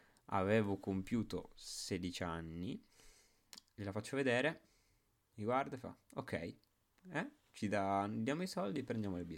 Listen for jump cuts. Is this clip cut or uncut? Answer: uncut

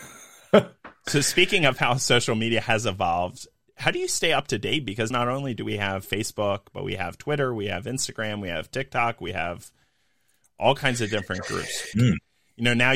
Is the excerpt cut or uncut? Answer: cut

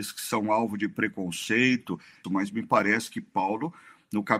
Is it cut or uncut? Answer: cut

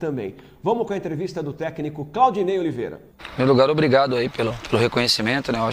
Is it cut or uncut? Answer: cut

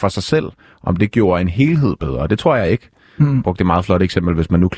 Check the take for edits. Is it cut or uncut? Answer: uncut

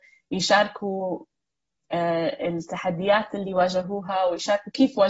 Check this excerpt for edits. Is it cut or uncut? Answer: uncut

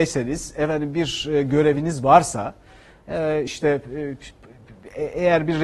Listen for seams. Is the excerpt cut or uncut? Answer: uncut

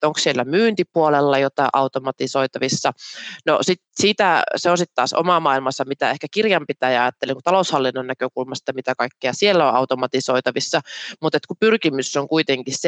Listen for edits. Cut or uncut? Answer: uncut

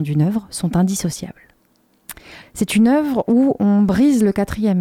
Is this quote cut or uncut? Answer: cut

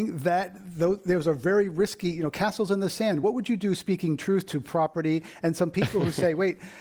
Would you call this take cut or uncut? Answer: uncut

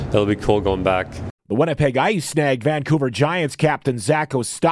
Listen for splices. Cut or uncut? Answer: cut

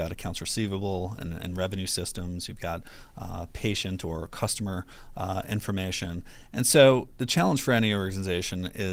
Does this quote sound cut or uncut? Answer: uncut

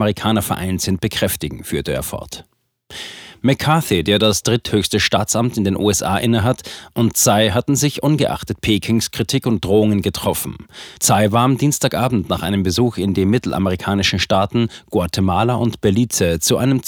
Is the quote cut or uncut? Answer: cut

